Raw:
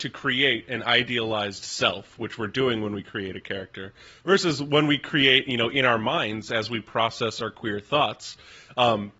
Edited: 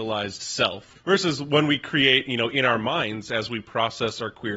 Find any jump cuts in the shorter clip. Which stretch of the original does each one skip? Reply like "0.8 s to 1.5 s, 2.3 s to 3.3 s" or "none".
2.2 s to 4.1 s